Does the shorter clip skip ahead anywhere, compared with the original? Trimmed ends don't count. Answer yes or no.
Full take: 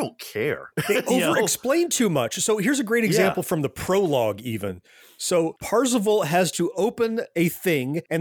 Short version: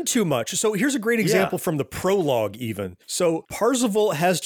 yes